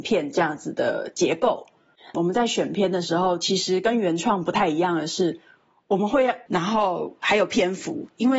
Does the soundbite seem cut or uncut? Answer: cut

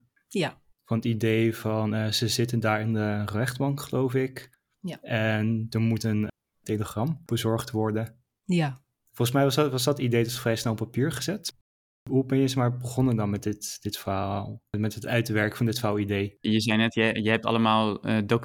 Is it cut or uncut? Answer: uncut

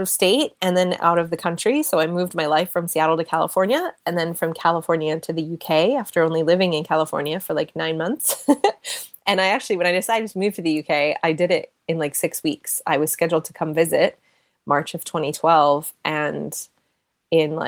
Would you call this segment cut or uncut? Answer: uncut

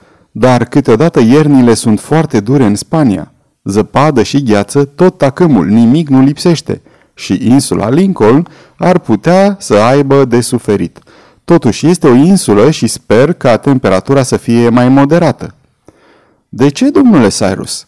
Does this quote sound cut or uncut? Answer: uncut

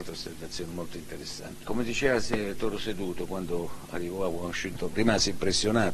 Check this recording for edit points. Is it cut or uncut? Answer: cut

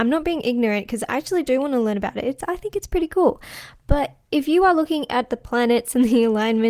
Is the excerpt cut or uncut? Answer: uncut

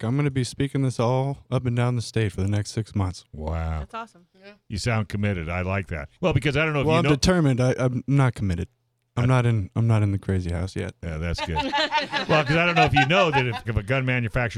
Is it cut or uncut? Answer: cut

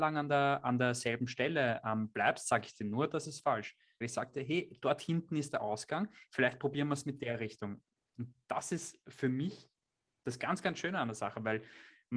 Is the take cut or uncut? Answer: cut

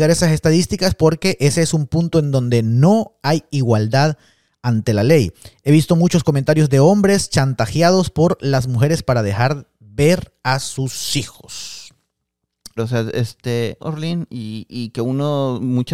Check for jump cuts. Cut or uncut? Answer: cut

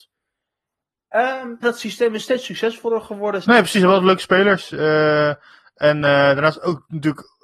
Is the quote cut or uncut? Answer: cut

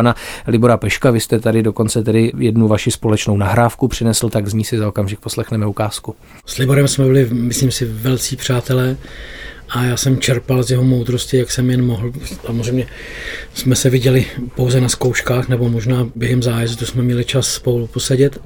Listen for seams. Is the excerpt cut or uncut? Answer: uncut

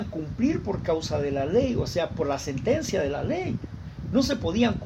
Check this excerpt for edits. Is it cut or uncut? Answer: uncut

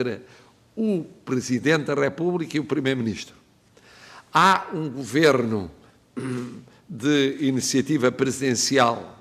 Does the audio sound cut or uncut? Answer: uncut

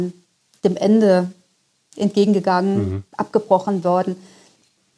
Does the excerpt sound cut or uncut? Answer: uncut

